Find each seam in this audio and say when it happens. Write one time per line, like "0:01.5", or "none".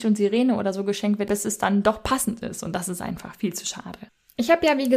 0:01.3